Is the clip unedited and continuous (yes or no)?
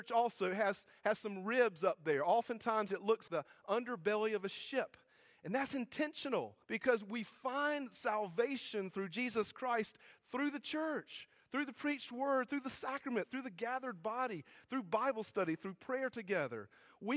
no